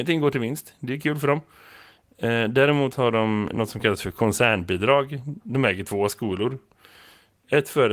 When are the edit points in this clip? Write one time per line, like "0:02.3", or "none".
0:03.5